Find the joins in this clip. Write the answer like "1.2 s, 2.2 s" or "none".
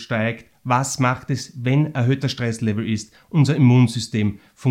none